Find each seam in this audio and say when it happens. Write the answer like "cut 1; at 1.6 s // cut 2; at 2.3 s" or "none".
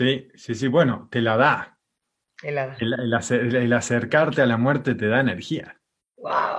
none